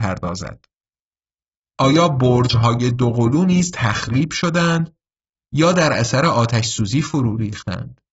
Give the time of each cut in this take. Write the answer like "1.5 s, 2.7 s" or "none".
1.8 s